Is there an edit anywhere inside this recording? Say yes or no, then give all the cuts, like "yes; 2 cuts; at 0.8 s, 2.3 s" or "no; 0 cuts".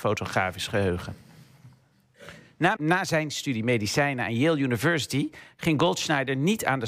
yes; 1 cut; at 2.8 s